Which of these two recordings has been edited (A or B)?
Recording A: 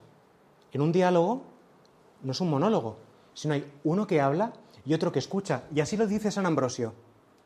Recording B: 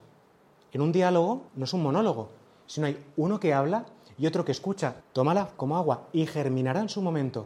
B